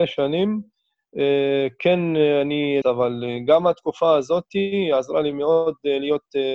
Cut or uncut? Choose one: cut